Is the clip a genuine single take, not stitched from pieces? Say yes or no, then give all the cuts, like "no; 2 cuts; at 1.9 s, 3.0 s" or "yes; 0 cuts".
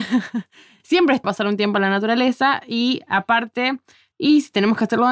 no; 2 cuts; at 1.2 s, 4.1 s